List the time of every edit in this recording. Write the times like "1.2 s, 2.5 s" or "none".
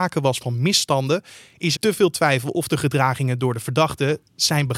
1.8 s